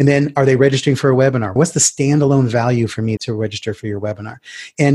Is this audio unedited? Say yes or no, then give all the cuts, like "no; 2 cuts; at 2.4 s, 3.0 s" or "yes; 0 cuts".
no; 2 cuts; at 1.6 s, 3.2 s